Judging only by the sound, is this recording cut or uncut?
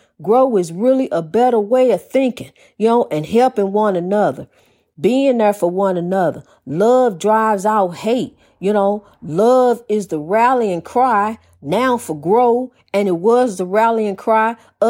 uncut